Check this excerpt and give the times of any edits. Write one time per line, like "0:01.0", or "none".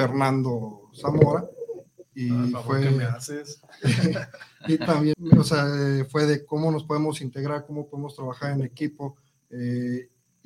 0:05.1